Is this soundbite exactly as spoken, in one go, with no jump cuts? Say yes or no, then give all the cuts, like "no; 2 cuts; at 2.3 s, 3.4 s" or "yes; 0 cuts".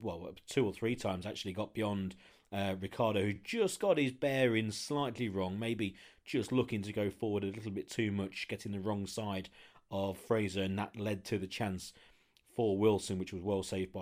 yes; 0 cuts